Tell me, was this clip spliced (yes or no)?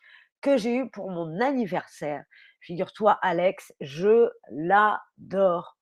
no